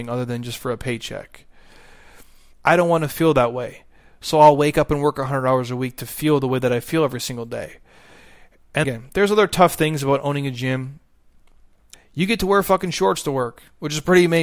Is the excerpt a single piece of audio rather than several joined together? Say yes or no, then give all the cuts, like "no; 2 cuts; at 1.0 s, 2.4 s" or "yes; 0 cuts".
no; 3 cuts; at 2.5 s, 8.8 s, 11.9 s